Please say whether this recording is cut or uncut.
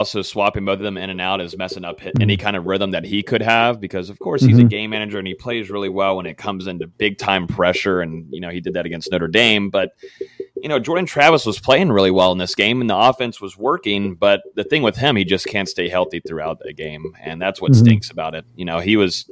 uncut